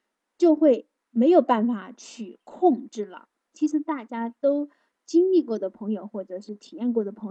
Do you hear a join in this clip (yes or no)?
yes